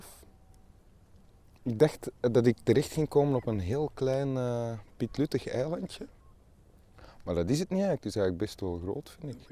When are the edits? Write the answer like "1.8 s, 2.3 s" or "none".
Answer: none